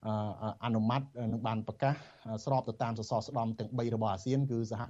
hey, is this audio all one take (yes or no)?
yes